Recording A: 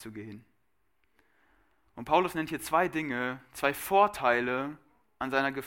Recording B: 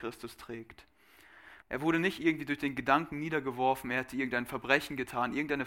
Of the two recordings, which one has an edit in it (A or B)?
B